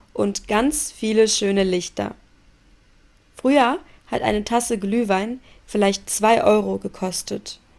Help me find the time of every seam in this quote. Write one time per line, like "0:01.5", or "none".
none